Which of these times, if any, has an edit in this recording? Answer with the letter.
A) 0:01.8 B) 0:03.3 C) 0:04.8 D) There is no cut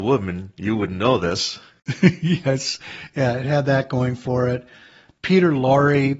D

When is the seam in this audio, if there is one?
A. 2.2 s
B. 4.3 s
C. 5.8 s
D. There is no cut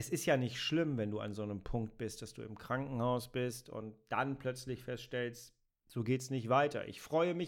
D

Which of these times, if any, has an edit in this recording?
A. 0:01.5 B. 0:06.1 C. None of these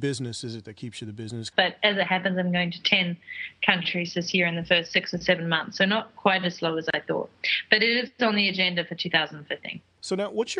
A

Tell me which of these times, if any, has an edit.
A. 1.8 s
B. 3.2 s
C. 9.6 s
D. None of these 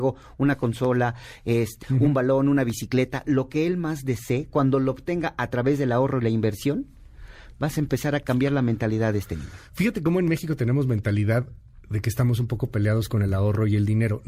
A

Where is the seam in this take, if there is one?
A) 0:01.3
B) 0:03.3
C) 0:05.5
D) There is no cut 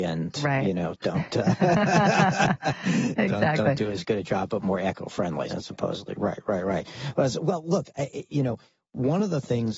C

